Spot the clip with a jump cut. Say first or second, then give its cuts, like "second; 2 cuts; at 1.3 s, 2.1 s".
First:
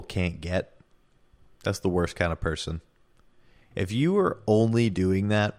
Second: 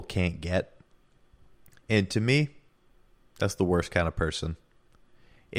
first; 2 cuts; at 1.6 s, 3.7 s